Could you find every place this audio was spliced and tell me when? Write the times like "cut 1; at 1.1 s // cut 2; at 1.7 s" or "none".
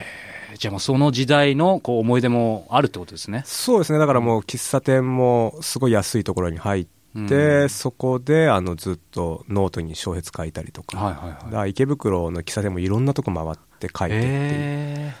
none

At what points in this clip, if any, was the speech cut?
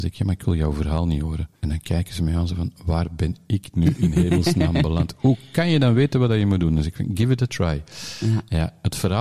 cut 1; at 1.6 s

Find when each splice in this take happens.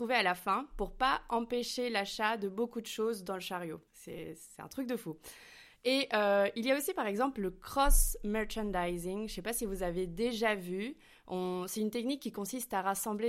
cut 1; at 3.9 s

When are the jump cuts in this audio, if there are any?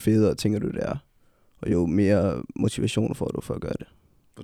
none

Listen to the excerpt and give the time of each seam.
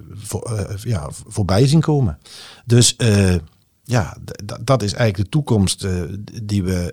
none

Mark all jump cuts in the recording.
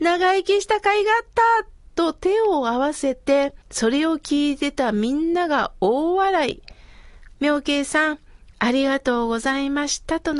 cut 1; at 3.6 s // cut 2; at 7.3 s // cut 3; at 8.5 s

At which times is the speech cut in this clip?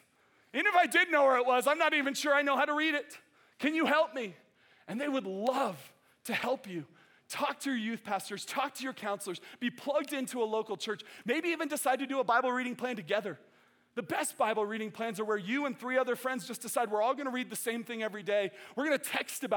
none

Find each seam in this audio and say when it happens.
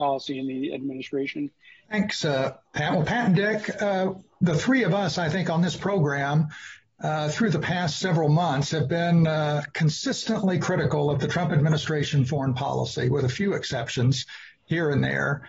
cut 1; at 1.8 s

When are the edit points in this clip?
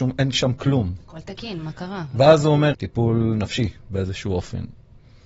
cut 1; at 1.6 s // cut 2; at 2.7 s

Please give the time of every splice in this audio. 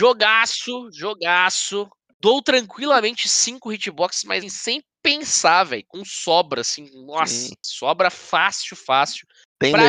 cut 1; at 4.4 s

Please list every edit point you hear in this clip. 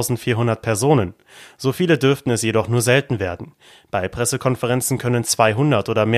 none

